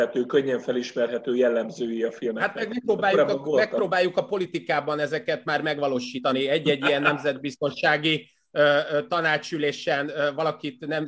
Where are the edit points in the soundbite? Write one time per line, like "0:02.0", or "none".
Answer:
none